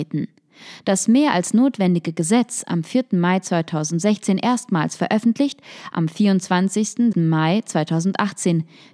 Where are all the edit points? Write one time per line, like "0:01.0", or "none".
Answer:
0:07.1

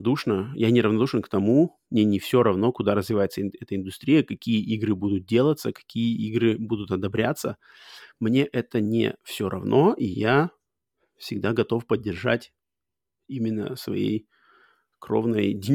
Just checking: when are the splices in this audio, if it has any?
0:09.2

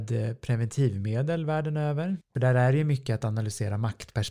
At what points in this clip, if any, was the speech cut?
0:02.2

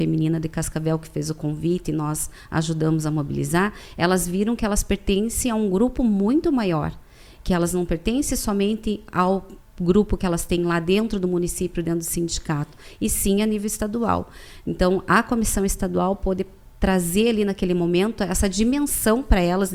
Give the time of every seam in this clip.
none

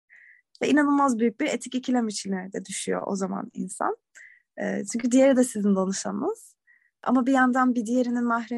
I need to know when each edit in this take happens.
none

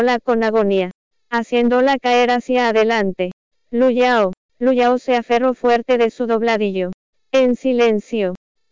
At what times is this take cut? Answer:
0:04.5

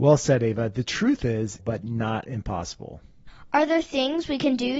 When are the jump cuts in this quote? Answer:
0:01.6

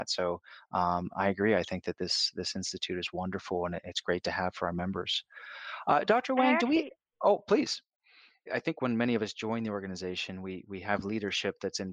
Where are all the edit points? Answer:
0:08.5

